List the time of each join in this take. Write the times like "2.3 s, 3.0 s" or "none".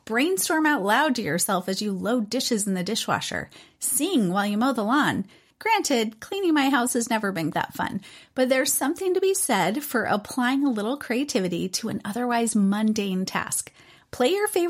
5.5 s, 7.5 s